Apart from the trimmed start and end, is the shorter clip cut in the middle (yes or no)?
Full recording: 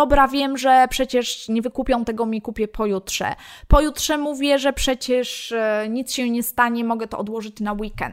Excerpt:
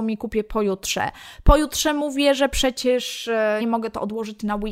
yes